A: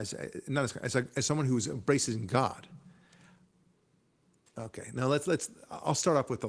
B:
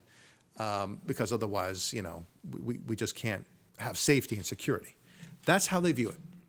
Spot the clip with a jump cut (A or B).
B